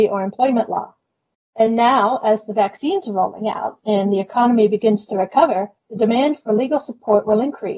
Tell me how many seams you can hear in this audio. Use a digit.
2